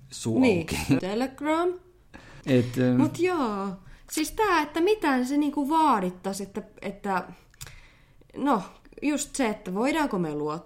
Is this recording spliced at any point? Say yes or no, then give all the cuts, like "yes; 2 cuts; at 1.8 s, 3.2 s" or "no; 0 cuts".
yes; 2 cuts; at 1.0 s, 2.4 s